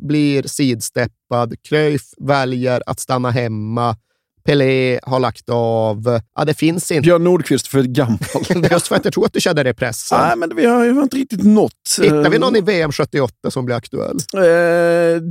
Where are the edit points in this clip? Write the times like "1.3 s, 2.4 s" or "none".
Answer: 6.3 s, 8.7 s